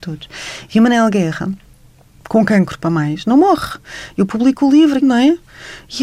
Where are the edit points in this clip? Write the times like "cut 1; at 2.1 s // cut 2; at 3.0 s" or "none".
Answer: cut 1; at 2.2 s // cut 2; at 5.0 s